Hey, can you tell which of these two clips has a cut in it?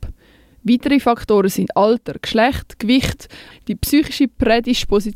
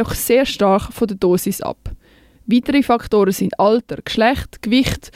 first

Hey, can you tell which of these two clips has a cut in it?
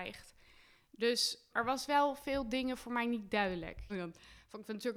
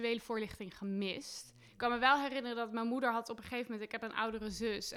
first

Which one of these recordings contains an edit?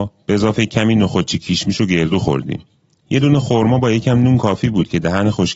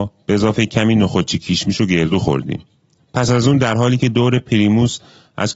second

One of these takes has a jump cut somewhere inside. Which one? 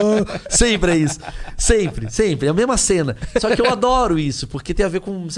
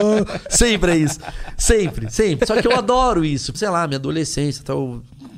second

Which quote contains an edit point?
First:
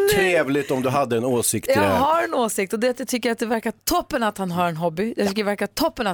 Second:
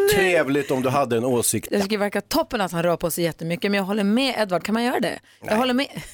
second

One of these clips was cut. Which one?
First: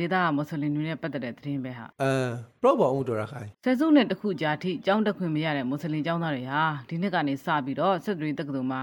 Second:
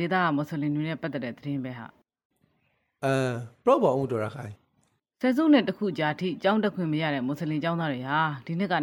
first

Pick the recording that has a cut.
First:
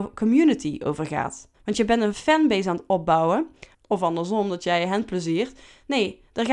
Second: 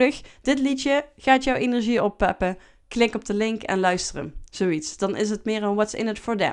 first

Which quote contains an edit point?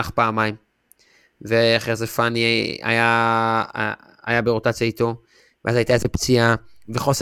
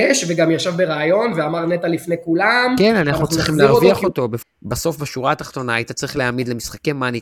second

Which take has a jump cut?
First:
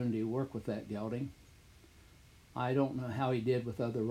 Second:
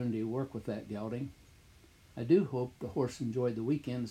second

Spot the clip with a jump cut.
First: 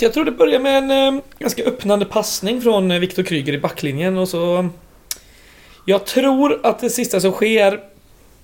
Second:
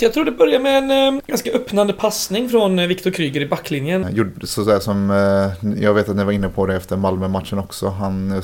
second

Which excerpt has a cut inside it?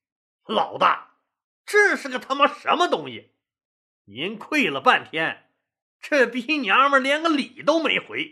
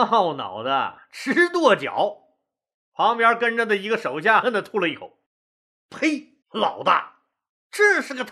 second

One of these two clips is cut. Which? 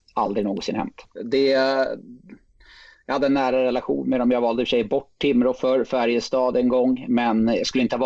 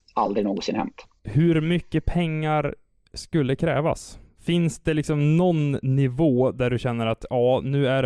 first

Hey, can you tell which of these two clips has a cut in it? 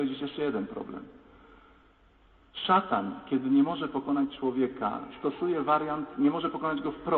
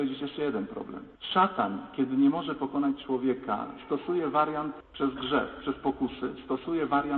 second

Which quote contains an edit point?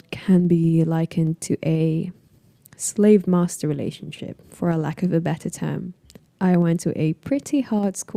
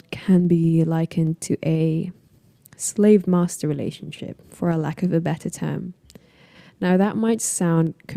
first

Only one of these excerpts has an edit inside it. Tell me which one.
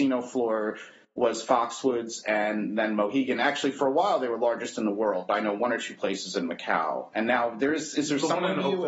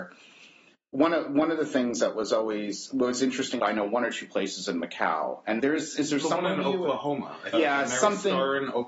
second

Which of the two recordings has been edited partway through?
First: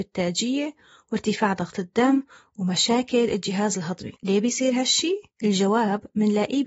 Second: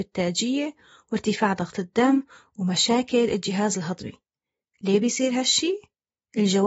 first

